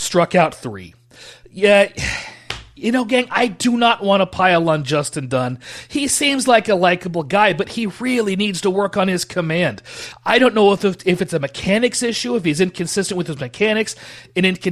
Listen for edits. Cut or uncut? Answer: uncut